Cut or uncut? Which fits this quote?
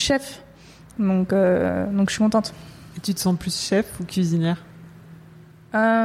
uncut